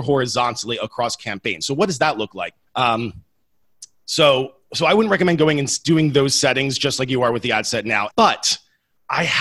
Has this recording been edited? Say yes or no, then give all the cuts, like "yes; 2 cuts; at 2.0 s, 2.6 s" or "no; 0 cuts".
yes; 2 cuts; at 2.7 s, 8.1 s